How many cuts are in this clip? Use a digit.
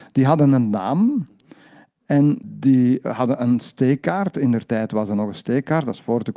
1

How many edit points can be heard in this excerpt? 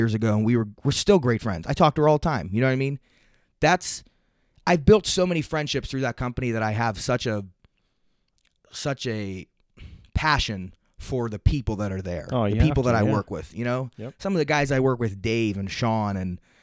0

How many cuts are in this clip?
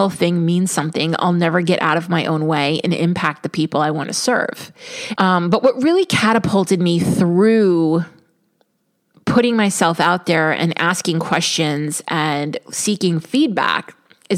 1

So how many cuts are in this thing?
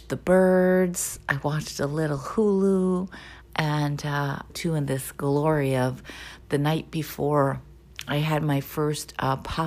2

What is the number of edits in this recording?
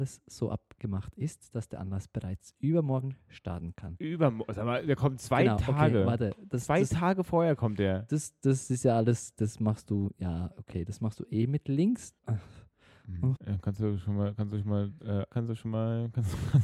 3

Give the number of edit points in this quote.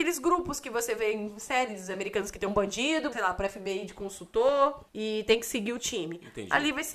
2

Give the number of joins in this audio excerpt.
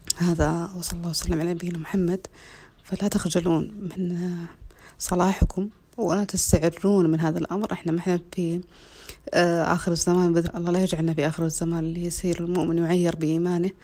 1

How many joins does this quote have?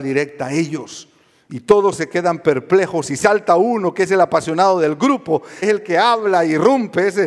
1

